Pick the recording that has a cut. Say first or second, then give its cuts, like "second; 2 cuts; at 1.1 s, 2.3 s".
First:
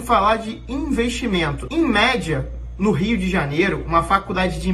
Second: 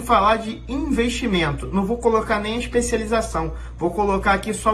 first; 1 cut; at 1.7 s